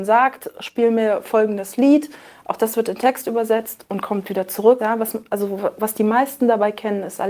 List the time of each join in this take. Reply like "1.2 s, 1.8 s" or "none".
4.8 s